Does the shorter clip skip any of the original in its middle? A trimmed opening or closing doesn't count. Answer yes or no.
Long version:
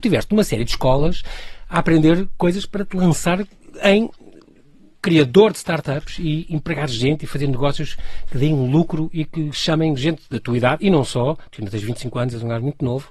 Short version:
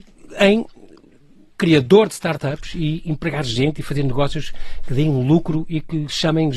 no